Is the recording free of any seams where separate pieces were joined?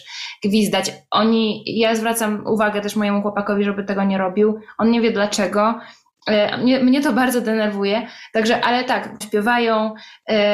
no; 1 cut; at 9.2 s

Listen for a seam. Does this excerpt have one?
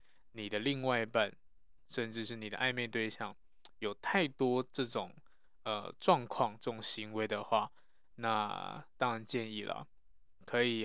no; 0 cuts

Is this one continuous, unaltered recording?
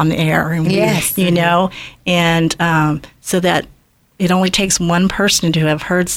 yes; 0 cuts

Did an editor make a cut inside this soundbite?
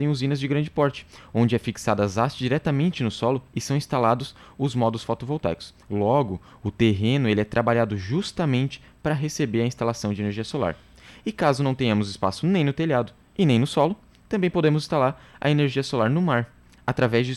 no; 0 cuts

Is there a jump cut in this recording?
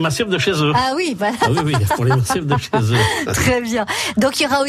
no; 0 cuts

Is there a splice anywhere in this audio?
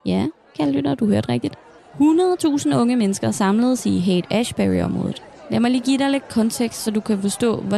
no; 0 cuts

